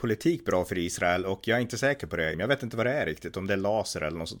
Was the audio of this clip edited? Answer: yes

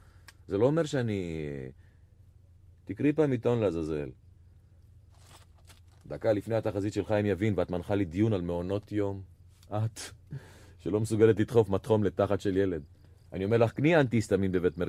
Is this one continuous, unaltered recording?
yes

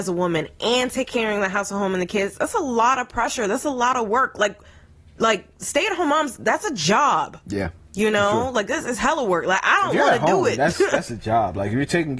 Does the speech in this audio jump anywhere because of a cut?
no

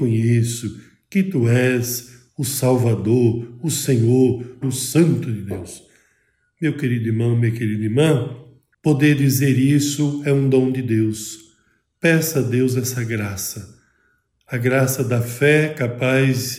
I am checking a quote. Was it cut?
yes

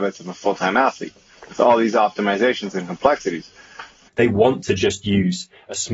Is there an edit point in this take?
yes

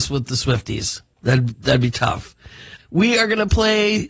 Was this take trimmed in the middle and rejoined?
yes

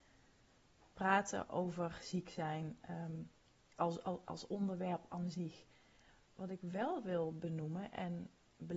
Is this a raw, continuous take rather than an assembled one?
no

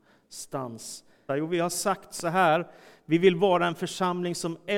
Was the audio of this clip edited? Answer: yes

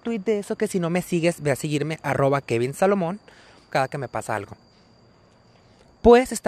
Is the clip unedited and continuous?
no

